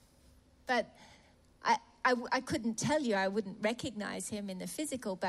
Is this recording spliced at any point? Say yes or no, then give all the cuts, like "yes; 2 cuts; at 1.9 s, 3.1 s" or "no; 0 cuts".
no; 0 cuts